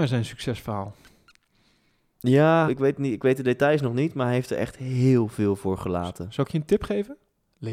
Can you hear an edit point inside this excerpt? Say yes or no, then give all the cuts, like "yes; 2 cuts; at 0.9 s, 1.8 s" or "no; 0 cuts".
yes; 1 cut; at 2.7 s